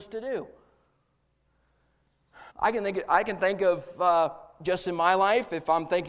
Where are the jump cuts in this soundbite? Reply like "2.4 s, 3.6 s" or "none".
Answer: 2.5 s